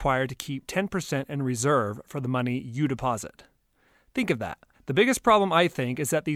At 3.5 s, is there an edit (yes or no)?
no